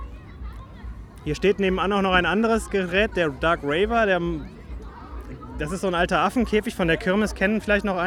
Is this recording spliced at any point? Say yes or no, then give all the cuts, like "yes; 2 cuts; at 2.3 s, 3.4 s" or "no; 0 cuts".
no; 0 cuts